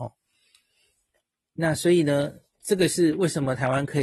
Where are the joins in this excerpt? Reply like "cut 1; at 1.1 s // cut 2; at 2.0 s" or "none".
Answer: none

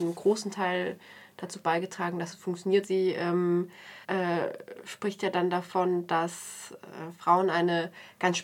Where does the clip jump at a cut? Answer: cut 1; at 2.8 s // cut 2; at 4.0 s

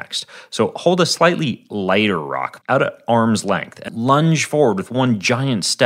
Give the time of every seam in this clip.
cut 1; at 2.6 s // cut 2; at 3.9 s

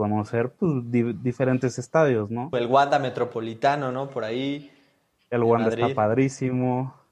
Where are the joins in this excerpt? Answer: cut 1; at 2.5 s

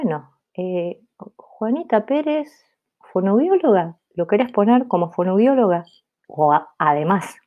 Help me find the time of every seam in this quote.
cut 1; at 6.2 s

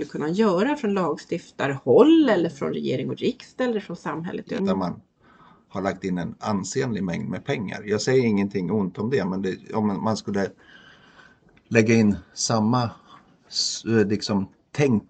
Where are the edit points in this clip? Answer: cut 1; at 4.6 s

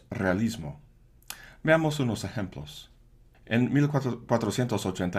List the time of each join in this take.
cut 1; at 3.3 s

